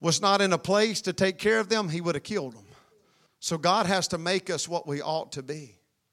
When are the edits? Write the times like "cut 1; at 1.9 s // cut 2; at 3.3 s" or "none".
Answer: cut 1; at 3.3 s